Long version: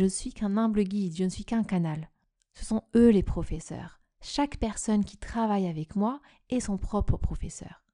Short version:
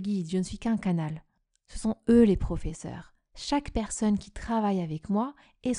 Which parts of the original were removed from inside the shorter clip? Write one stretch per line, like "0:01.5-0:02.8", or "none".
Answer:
none

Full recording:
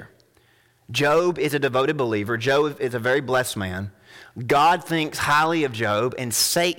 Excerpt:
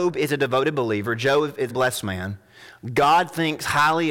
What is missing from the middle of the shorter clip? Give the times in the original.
0:02.9-0:03.2

